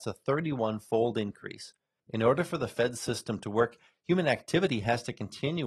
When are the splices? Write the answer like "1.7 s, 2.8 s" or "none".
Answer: 2.0 s